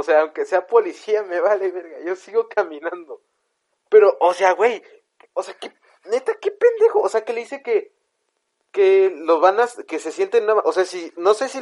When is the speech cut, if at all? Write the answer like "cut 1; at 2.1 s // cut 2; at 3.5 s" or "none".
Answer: none